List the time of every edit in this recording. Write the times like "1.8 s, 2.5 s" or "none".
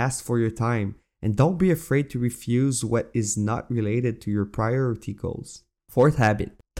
5.8 s